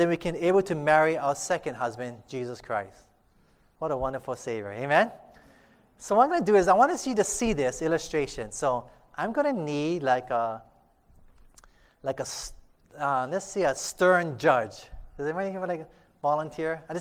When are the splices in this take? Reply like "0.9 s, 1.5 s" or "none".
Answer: none